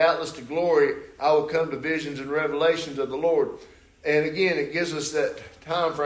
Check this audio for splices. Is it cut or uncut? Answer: uncut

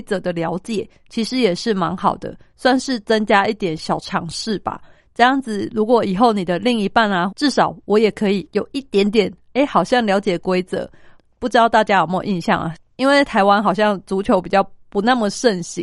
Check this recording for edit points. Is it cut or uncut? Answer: cut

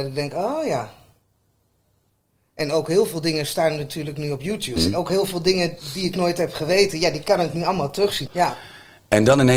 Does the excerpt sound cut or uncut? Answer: cut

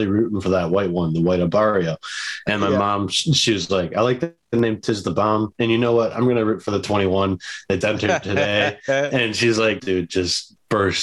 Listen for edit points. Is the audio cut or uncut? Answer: cut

